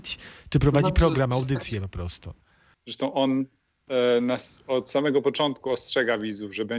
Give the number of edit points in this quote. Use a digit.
1